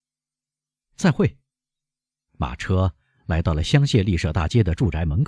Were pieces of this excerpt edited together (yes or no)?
no